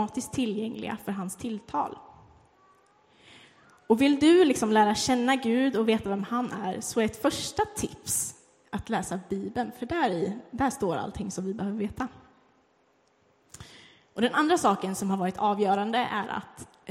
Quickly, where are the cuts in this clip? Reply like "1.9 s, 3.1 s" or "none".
none